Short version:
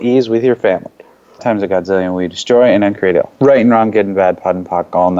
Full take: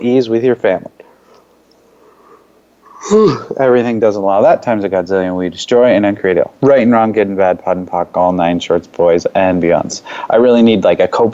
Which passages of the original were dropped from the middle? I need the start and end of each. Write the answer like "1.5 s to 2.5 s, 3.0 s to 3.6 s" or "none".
1.4 s to 4.6 s